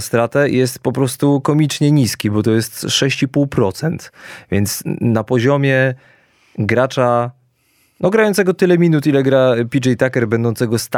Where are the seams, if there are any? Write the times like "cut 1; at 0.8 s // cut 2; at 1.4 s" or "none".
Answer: none